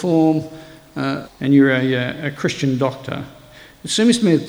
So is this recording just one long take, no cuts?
no; 1 cut; at 1.2 s

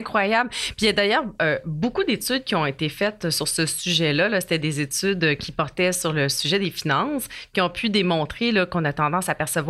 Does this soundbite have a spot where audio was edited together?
no; 0 cuts

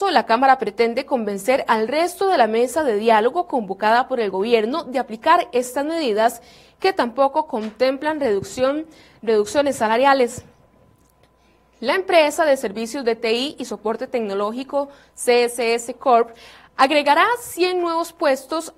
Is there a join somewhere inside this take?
no; 0 cuts

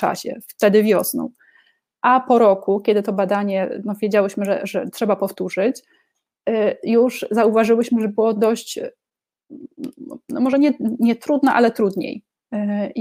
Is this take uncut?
yes; 0 cuts

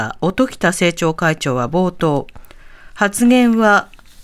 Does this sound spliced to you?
no; 0 cuts

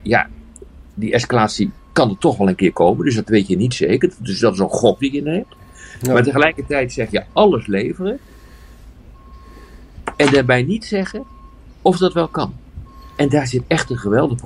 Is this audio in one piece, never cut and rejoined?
yes; 0 cuts

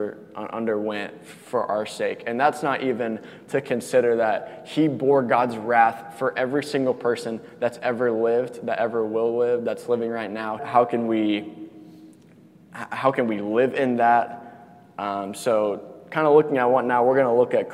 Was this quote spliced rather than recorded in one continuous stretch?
yes; 1 cut; at 10.6 s

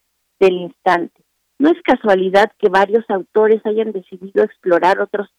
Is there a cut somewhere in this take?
yes; 1 cut; at 1.4 s

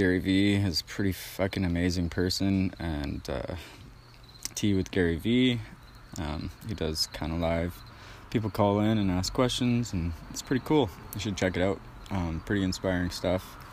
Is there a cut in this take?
yes; 1 cut; at 4.5 s

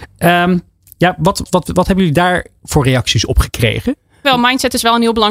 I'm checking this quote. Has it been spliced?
yes; 2 cuts; at 1.4 s, 4.2 s

